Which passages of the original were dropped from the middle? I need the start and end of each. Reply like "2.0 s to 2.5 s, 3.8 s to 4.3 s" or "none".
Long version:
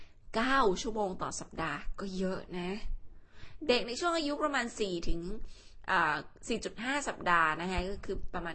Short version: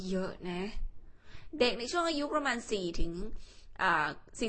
none